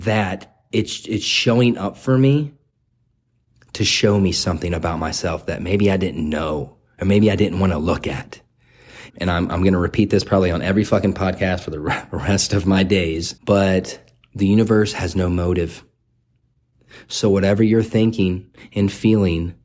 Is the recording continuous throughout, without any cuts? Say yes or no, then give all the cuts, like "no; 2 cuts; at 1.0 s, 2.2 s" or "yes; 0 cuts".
no; 2 cuts; at 9.1 s, 13.4 s